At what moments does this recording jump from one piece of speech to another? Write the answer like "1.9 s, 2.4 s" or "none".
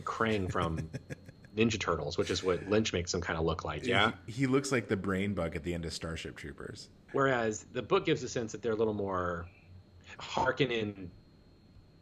7.1 s, 10.2 s